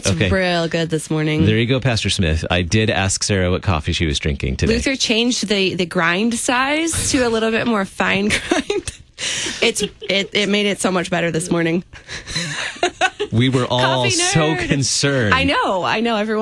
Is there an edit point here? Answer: no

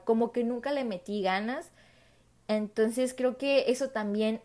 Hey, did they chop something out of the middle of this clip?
no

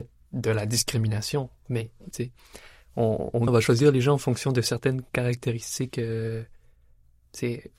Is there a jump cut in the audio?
yes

